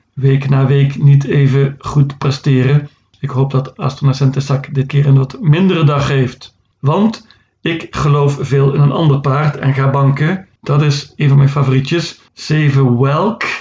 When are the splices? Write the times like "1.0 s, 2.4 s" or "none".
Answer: 10.6 s, 12.3 s